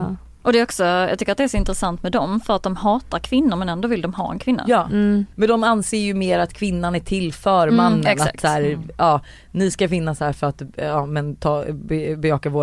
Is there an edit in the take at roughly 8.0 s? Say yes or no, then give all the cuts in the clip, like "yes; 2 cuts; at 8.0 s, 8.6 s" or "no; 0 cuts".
no; 1 cut; at 5.3 s